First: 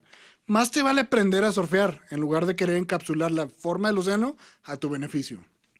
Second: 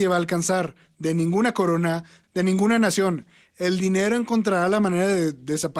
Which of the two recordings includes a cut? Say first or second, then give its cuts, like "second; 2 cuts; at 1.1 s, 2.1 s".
second; 1 cut; at 2.2 s